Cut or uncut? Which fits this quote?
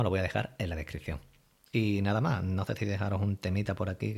uncut